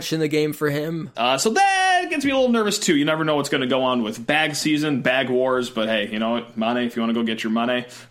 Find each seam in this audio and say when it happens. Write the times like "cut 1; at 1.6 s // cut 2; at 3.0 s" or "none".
cut 1; at 1.1 s